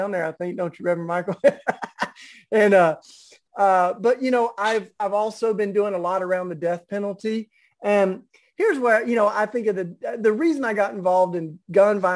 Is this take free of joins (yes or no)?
yes